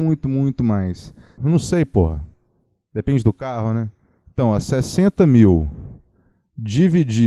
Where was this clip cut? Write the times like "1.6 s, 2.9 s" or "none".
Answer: 1.4 s